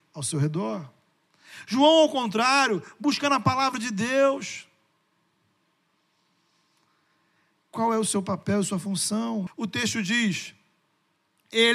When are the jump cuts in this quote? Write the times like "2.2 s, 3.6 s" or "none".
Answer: 9.5 s